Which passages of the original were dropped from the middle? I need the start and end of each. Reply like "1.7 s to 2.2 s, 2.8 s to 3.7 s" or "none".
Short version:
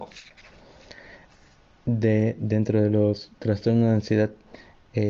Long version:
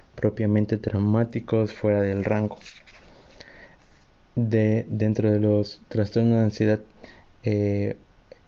none